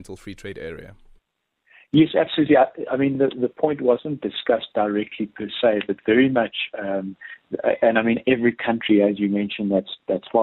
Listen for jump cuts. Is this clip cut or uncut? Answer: uncut